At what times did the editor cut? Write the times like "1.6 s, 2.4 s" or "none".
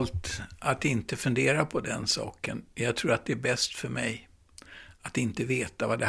none